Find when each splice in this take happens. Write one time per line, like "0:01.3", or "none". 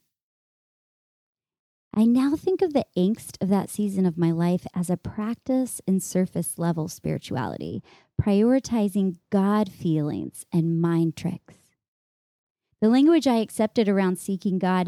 none